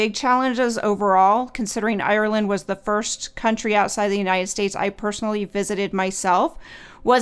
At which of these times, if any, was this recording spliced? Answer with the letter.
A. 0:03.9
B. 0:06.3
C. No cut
C